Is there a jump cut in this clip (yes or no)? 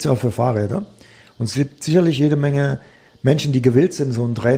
no